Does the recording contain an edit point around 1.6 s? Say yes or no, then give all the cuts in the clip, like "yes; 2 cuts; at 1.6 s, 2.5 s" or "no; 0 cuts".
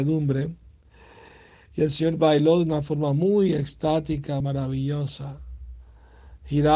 no; 1 cut; at 4.4 s